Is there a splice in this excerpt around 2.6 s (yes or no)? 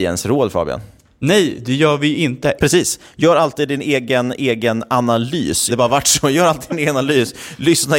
yes